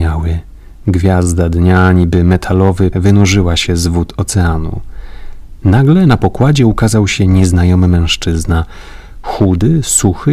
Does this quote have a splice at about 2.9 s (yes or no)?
yes